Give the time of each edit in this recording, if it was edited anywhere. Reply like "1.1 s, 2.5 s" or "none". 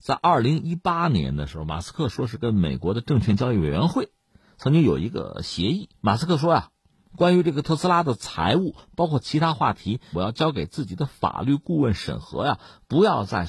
10.1 s